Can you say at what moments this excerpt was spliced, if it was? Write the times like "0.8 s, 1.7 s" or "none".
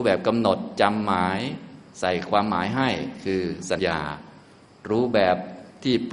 3.8 s